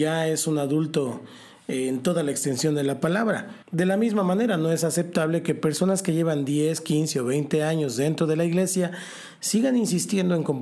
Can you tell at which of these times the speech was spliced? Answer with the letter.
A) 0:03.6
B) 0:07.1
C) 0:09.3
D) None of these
A